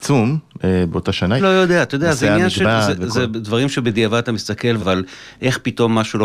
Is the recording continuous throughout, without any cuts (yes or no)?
no